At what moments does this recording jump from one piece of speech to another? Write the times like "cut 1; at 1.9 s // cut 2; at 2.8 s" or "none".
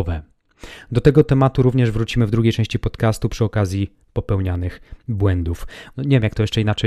cut 1; at 5.9 s